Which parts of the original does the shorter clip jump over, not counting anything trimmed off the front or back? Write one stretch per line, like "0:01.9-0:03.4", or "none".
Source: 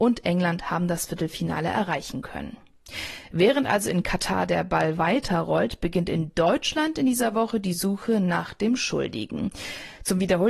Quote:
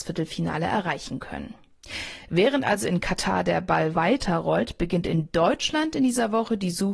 none